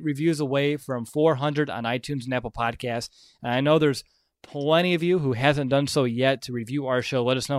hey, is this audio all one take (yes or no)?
yes